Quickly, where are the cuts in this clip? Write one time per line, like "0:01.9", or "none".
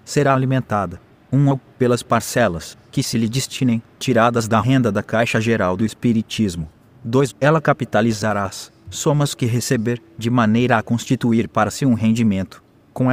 0:07.3